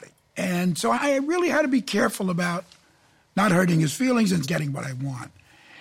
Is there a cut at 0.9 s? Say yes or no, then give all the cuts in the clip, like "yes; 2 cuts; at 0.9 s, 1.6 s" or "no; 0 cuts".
yes; 2 cuts; at 0.9 s, 4.4 s